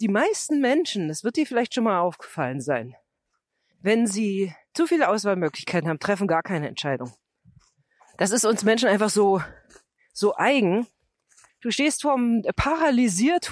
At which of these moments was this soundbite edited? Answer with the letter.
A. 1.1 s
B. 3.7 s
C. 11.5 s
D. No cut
C